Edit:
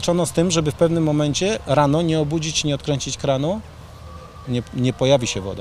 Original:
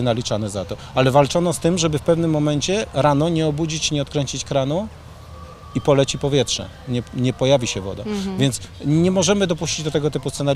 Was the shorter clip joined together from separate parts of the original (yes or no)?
yes